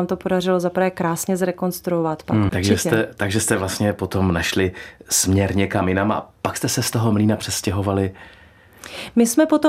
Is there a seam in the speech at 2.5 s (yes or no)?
yes